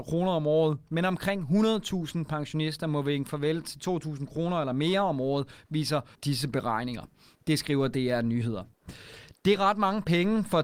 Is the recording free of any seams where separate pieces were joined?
yes; 0 cuts

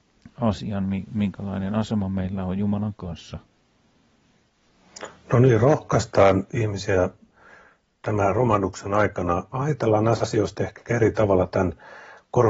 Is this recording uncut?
no; 1 cut; at 9.5 s

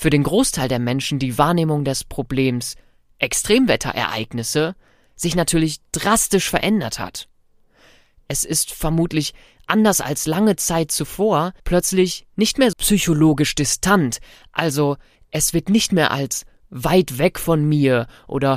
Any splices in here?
yes; 2 cuts; at 11.6 s, 12.7 s

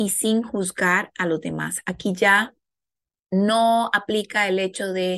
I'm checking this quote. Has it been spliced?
yes; 1 cut; at 3.1 s

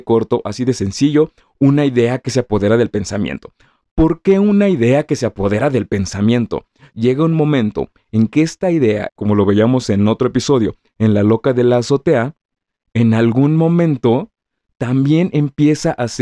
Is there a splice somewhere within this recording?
yes; 2 cuts; at 6.9 s, 9.1 s

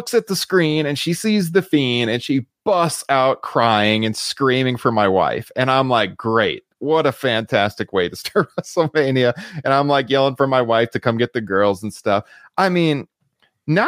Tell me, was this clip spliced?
no; 0 cuts

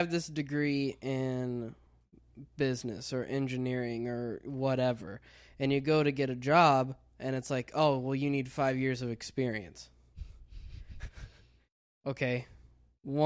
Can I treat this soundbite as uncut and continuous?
yes; 0 cuts

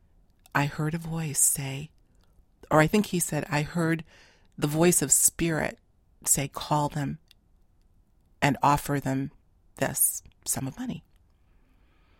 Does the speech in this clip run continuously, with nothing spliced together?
yes; 0 cuts

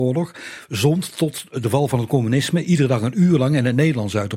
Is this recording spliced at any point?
no; 0 cuts

